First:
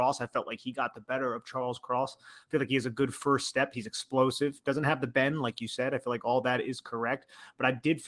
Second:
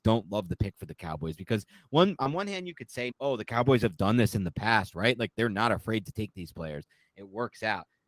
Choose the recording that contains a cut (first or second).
second